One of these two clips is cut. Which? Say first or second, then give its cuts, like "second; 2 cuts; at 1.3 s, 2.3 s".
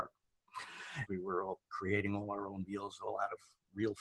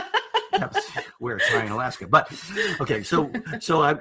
first; 1 cut; at 1.1 s